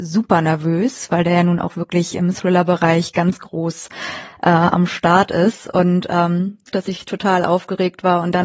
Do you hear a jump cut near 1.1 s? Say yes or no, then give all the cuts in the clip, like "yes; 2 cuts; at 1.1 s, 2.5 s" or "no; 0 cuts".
no; 1 cut; at 6.7 s